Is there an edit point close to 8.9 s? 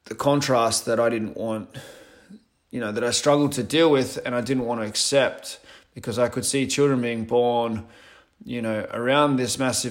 no; 0 cuts

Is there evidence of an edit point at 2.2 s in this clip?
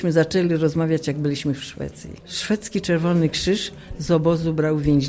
yes; 1 cut; at 2.2 s

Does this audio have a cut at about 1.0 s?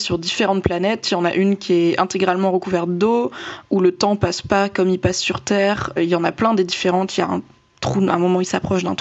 no; 1 cut; at 6.0 s

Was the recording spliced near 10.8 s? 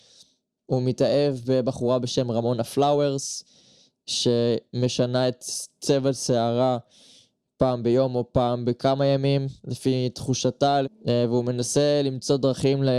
yes; 1 cut; at 10.8 s

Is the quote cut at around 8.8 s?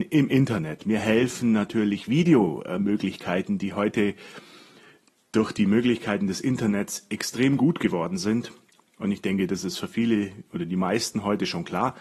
yes; 1 cut; at 8.8 s

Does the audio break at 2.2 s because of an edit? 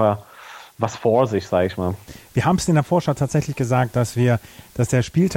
no; 0 cuts

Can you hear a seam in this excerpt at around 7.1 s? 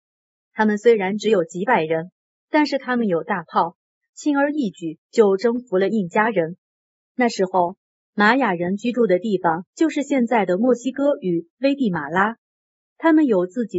yes; 1 cut; at 7.1 s

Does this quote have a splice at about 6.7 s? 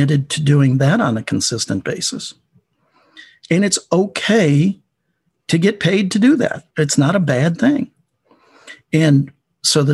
yes; 1 cut; at 6.7 s

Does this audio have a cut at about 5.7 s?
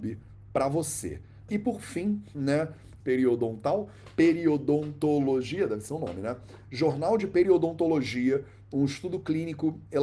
no; 2 cuts; at 1.5 s, 3.0 s

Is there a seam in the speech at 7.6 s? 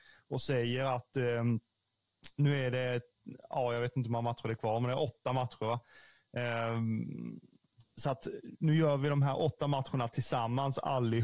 no; 0 cuts

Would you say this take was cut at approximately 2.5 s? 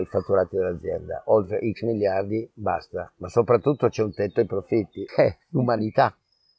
yes; 2 cuts; at 2.5 s, 5.1 s

